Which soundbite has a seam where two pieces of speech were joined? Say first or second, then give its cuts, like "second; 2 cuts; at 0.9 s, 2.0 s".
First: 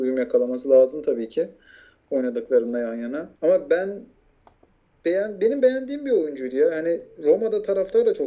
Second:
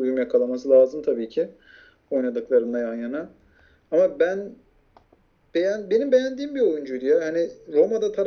first; 1 cut; at 3.3 s